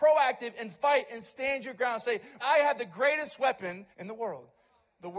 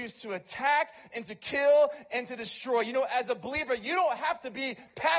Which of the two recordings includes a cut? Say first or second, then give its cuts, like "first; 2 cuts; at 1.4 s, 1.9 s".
first; 2 cuts; at 2.4 s, 3.9 s